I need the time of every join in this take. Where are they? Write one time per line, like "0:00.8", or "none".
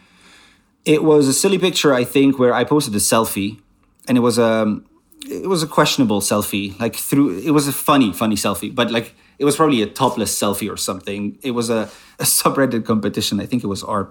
none